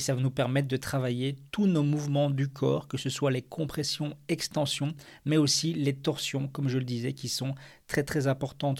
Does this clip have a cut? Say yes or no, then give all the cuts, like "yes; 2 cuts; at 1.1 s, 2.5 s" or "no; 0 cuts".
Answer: no; 0 cuts